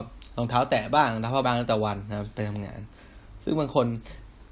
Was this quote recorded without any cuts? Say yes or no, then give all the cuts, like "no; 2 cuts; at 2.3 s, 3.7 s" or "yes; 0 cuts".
no; 1 cut; at 1.4 s